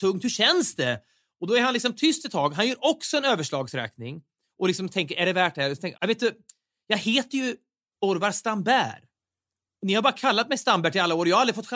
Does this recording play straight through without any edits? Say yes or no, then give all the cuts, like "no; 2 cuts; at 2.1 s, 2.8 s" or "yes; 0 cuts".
no; 1 cut; at 5.9 s